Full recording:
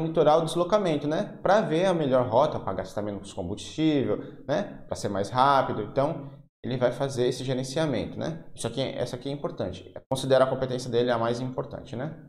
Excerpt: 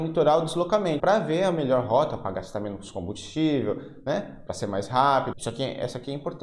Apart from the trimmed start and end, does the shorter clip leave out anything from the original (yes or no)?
yes